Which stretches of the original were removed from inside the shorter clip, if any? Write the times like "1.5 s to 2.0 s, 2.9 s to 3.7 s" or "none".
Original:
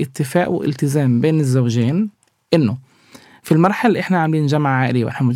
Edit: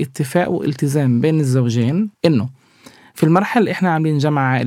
2.1 s to 2.4 s